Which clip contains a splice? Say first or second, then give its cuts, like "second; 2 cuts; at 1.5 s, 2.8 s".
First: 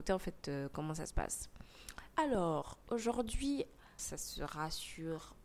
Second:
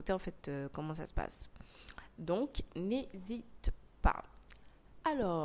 first; 2 cuts; at 2.1 s, 4.0 s